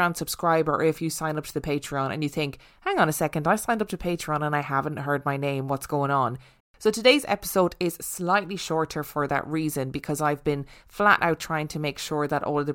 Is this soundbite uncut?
no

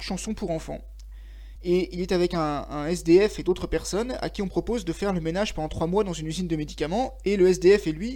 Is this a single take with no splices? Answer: no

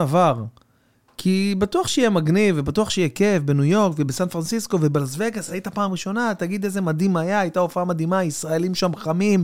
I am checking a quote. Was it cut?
no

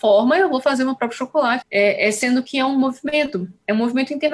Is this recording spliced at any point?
yes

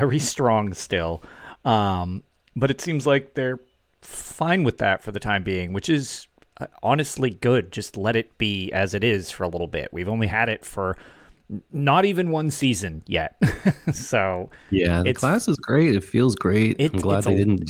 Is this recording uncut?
yes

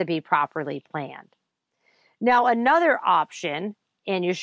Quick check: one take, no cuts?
yes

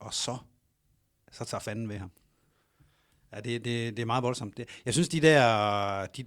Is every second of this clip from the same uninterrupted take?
yes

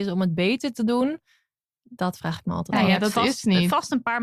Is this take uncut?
yes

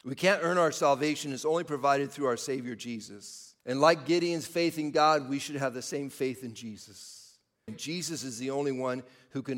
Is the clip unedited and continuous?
no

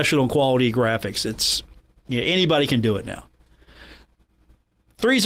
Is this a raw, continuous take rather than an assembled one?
yes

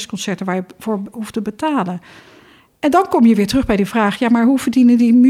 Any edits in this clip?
no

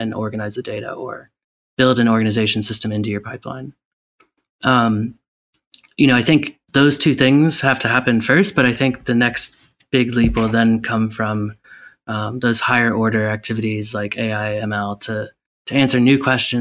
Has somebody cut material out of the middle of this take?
no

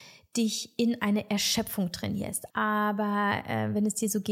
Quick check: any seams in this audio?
yes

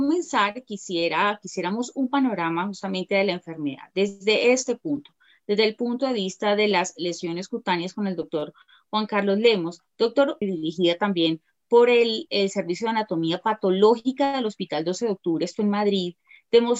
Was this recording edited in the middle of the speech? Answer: yes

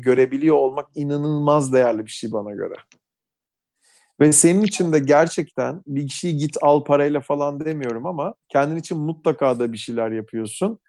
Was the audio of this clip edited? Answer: yes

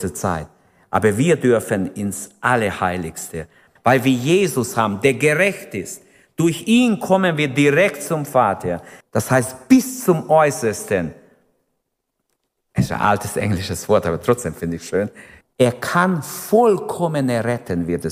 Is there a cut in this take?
yes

